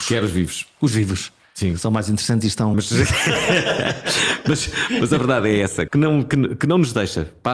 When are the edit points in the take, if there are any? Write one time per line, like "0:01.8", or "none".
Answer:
0:02.7
0:05.9